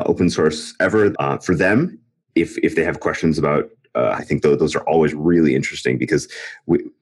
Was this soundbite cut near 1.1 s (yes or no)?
yes